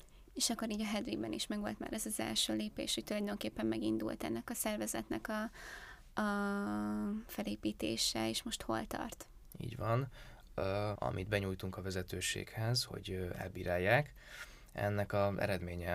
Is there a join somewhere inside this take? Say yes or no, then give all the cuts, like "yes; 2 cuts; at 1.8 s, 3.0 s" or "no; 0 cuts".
yes; 1 cut; at 10.9 s